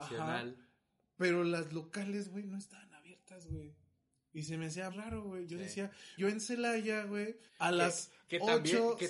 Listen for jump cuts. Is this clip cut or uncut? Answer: cut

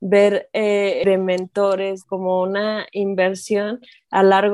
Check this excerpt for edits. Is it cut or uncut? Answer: cut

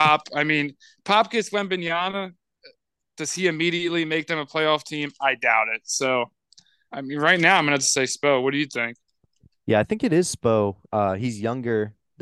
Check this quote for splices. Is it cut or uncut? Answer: uncut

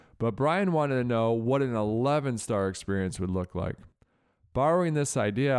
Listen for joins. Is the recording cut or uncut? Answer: uncut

